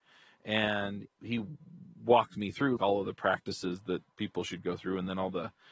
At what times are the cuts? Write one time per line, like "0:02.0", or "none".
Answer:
0:01.0
0:02.8